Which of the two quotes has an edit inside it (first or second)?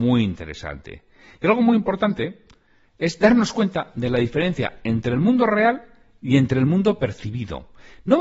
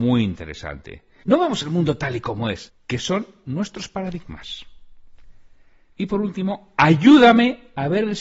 second